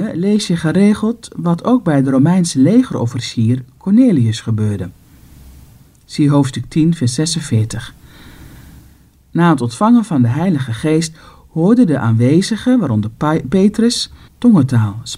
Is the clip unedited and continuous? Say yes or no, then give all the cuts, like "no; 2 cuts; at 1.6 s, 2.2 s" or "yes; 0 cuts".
no; 1 cut; at 14.3 s